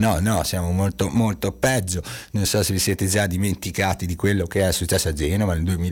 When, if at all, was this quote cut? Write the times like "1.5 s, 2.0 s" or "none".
none